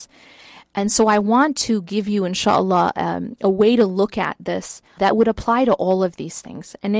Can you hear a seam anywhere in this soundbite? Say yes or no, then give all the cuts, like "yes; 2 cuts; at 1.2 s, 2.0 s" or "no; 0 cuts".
yes; 1 cut; at 5.0 s